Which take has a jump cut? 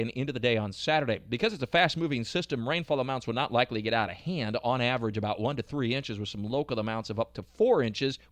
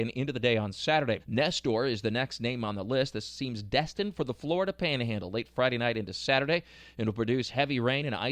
second; 1 cut; at 1.2 s

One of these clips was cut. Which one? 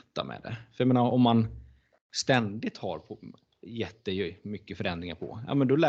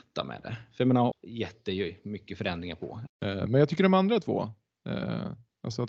second; 2 cuts; at 1.1 s, 3.1 s

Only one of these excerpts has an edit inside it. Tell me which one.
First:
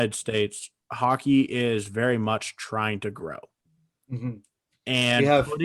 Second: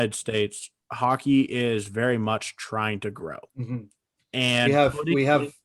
second; 1 cut; at 3.5 s

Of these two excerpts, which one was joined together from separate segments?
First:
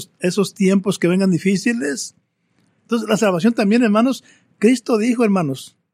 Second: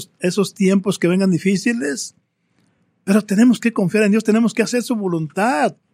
first; 1 cut; at 2.8 s

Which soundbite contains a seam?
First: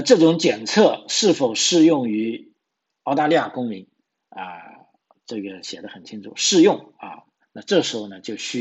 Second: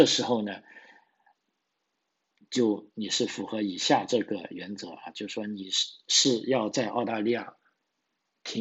first; 1 cut; at 7.4 s

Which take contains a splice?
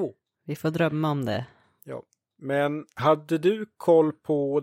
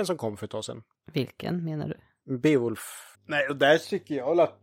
second; 1 cut; at 3.1 s

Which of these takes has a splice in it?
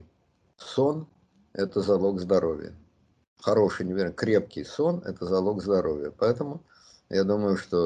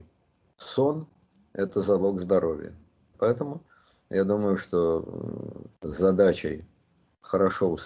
second; 2 cuts; at 3.1 s, 5.7 s

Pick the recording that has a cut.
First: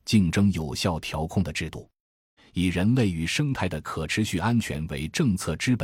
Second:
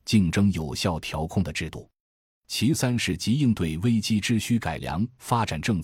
first; 1 cut; at 2.4 s

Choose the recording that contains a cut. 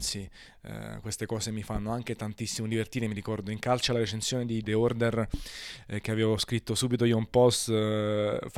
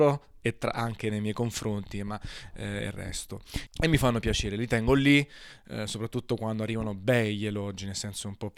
second; 1 cut; at 3.7 s

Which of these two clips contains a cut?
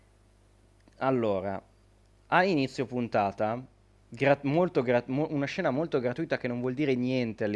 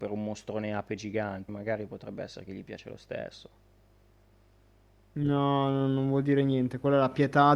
second; 1 cut; at 1.5 s

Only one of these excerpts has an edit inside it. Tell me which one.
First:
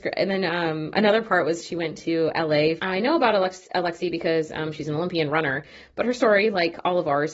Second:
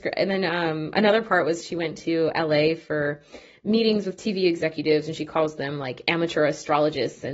first; 1 cut; at 2.8 s

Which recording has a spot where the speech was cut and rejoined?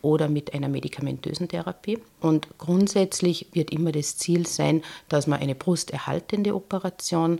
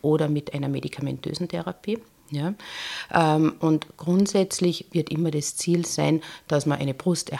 first; 1 cut; at 2.2 s

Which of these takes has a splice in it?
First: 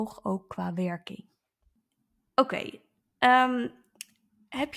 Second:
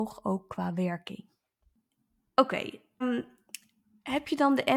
second; 1 cut; at 3.0 s

